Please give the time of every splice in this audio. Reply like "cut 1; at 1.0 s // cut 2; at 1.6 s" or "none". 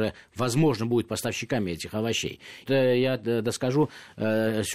cut 1; at 2.7 s